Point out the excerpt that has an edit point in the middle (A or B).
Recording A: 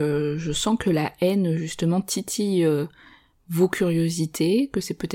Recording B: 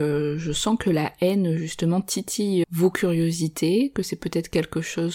B